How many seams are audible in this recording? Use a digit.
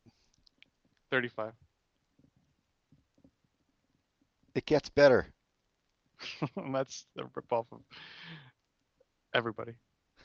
0